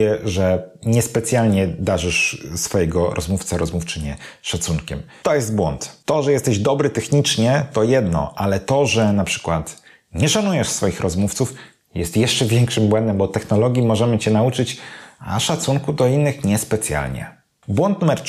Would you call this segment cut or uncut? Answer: uncut